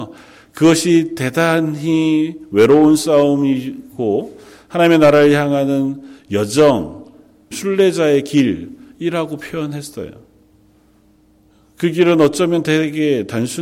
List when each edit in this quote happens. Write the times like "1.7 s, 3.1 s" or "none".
7.5 s